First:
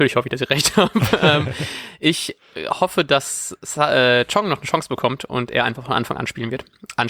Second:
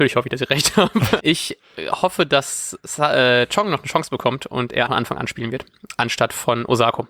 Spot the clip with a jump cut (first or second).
second